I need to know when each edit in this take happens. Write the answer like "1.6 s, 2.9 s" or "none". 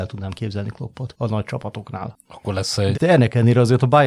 2.9 s

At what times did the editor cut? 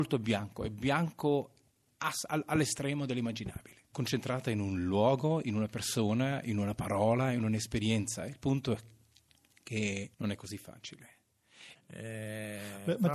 5.4 s, 10.1 s, 11.8 s

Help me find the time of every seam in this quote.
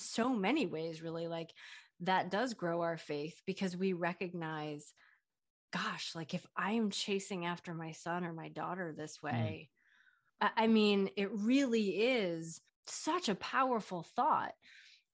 10.4 s, 12.7 s

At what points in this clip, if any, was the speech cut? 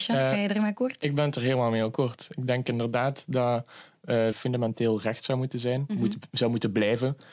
4.3 s

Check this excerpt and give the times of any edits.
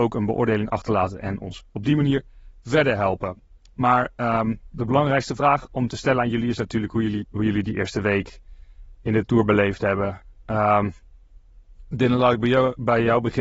none

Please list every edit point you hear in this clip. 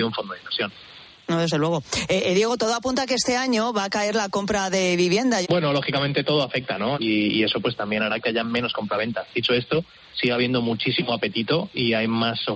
5.4 s, 6.9 s

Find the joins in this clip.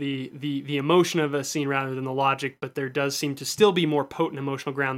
none

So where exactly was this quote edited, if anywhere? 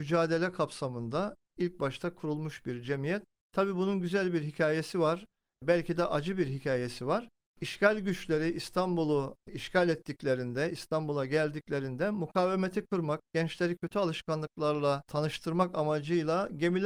none

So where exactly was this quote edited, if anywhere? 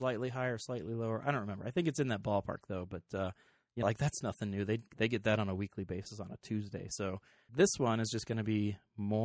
3.8 s, 7.5 s

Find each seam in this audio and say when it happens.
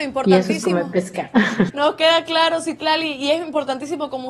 1.7 s

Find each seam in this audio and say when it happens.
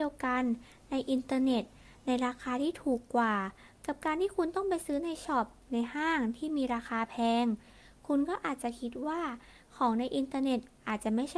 none

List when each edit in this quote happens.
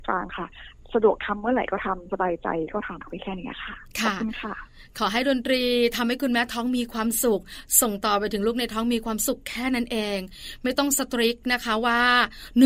3.0 s

